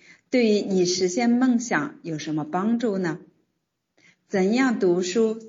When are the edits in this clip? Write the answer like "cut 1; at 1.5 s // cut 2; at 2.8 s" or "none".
none